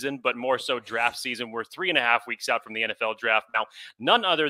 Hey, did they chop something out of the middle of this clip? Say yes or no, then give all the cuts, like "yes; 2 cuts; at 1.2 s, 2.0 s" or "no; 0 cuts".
no; 0 cuts